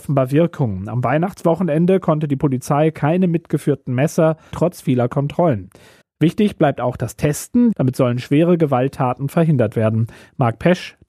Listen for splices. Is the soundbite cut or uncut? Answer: cut